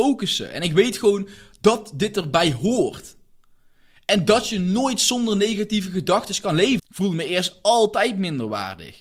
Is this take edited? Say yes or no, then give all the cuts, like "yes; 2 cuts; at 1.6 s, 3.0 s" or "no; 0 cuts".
yes; 1 cut; at 6.8 s